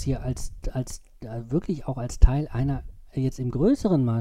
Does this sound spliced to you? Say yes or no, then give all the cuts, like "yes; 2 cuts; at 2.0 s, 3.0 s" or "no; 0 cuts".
no; 0 cuts